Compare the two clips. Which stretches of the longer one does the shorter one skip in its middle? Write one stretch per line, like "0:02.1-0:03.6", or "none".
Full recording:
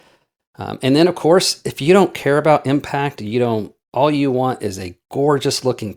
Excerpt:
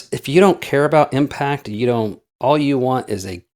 none